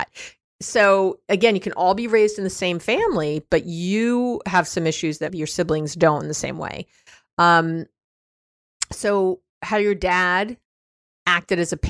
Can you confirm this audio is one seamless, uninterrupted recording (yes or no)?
no